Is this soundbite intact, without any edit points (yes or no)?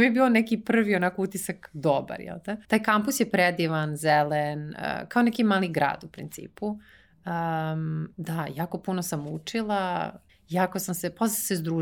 no